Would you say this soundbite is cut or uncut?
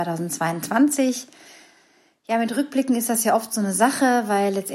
uncut